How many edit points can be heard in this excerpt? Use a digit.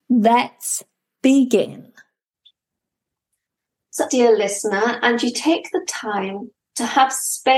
1